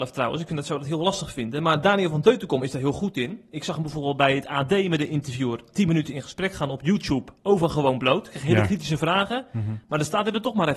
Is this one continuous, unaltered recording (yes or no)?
yes